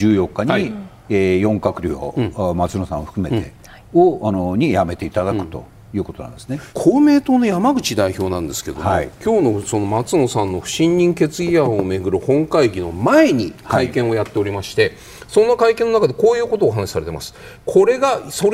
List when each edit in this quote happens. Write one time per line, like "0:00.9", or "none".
0:17.6